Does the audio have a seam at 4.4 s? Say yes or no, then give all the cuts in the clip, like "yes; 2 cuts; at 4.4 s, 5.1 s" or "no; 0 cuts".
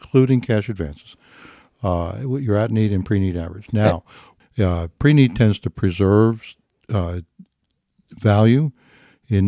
yes; 1 cut; at 4.4 s